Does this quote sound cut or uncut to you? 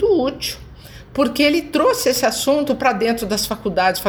uncut